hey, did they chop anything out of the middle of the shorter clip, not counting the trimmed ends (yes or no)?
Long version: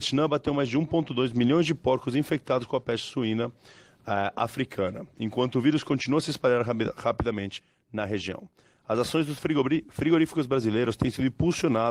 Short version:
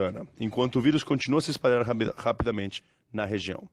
no